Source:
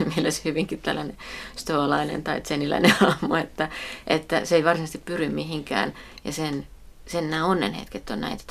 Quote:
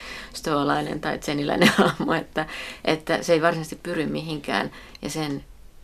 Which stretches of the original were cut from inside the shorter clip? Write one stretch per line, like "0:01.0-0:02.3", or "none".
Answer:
none